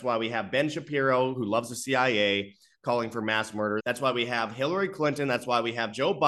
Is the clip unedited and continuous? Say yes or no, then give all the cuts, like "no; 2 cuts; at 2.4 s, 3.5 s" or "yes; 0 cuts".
no; 1 cut; at 3.8 s